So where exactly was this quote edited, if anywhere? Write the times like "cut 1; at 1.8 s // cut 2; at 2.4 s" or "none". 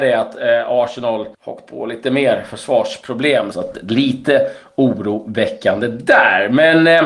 cut 1; at 1.3 s // cut 2; at 3.5 s